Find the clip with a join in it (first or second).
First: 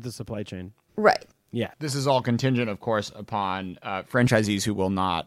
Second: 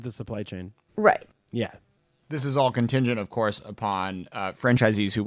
first